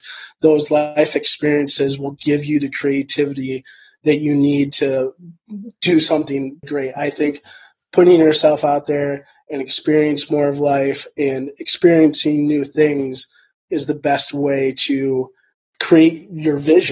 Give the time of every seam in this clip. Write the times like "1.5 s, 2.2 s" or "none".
6.6 s